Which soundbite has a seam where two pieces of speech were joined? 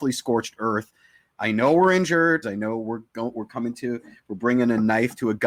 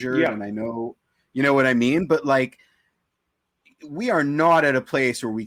first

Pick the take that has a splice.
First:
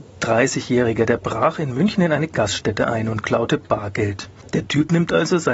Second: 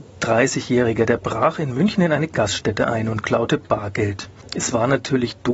first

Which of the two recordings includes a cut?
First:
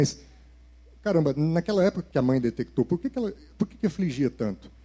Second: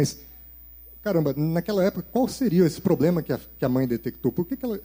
first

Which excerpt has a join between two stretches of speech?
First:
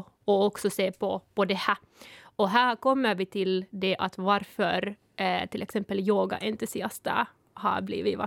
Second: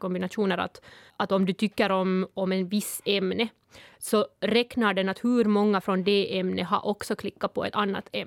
second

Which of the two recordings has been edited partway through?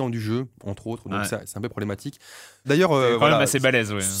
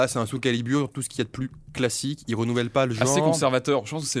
first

